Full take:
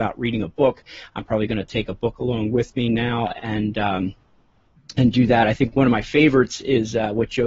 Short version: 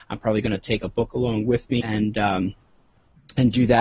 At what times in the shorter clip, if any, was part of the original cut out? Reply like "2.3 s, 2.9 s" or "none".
1.8 s